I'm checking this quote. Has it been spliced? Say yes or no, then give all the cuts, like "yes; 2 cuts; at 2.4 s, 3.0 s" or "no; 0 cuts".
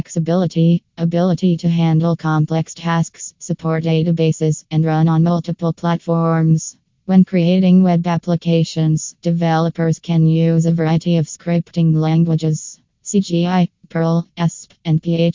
no; 0 cuts